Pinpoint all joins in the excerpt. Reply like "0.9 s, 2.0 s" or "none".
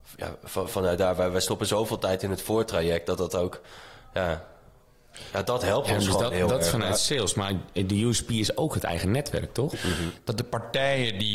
5.4 s, 9.7 s